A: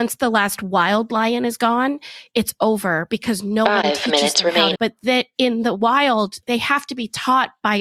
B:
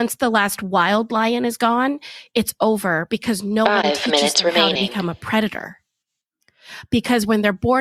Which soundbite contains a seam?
A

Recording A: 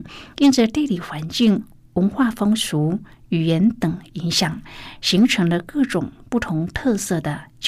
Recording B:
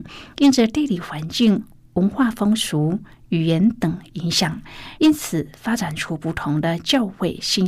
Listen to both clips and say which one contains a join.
B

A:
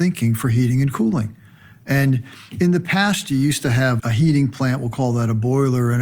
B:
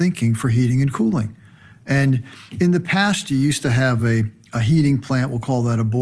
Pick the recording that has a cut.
A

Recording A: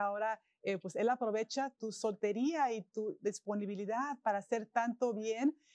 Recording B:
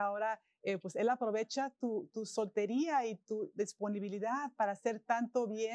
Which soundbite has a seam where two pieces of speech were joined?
A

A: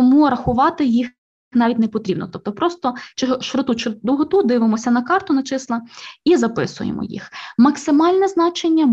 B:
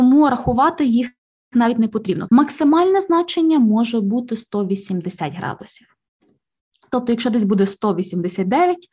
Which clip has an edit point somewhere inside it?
B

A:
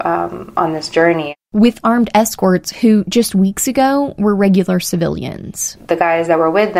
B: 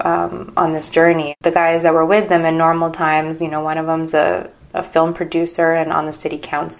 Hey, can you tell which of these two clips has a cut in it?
B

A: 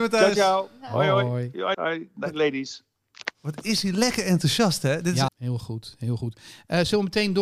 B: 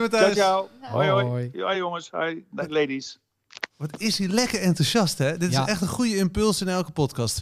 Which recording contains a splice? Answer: A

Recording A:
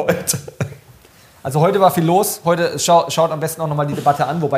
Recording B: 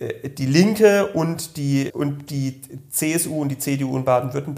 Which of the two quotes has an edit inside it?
B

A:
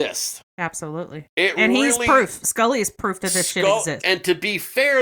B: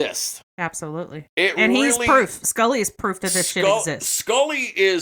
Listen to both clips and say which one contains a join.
A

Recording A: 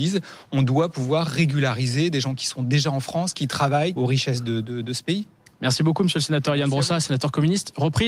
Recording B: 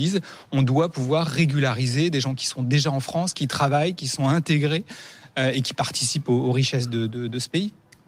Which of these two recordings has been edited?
A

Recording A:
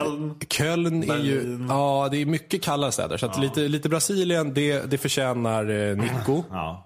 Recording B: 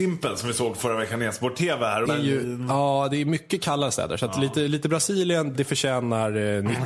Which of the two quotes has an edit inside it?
B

